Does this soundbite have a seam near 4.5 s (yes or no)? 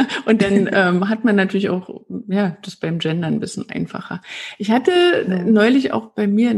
no